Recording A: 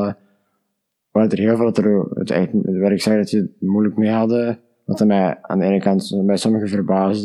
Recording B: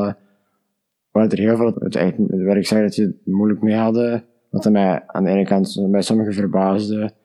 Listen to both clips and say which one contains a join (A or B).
B